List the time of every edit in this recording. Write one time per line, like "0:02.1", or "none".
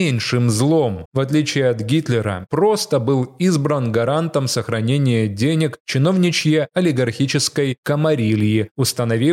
0:01.1
0:02.5